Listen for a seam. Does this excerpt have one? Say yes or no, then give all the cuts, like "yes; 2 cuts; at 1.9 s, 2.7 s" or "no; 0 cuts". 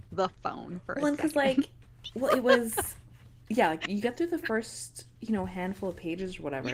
no; 0 cuts